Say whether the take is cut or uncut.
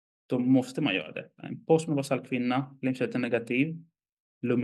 uncut